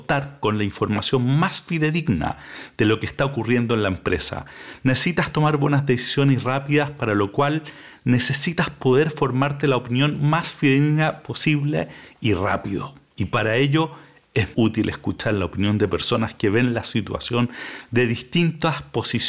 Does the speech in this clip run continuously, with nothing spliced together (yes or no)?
no